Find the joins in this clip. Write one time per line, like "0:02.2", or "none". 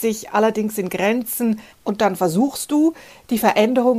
0:01.7